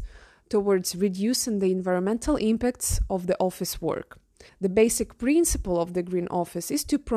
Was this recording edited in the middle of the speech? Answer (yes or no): yes